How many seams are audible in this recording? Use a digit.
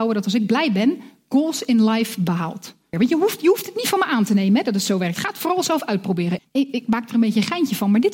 2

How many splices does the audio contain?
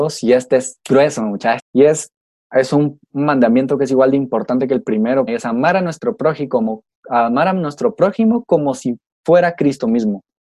3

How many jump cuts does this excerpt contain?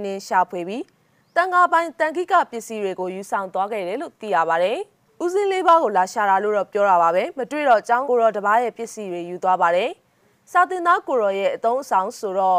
1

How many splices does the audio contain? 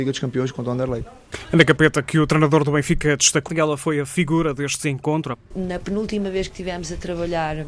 2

